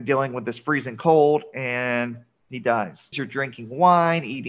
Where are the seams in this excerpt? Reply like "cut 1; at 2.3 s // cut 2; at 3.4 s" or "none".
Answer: cut 1; at 3.1 s